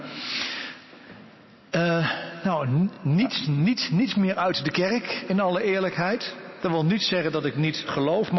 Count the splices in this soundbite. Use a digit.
0